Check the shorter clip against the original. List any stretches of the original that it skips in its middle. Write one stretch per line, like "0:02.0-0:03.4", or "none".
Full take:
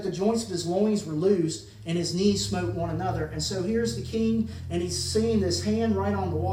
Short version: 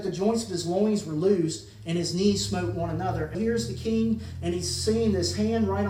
0:03.3-0:03.6